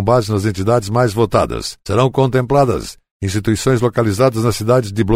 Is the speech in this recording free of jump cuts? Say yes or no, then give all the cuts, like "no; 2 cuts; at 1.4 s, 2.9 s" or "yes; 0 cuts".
yes; 0 cuts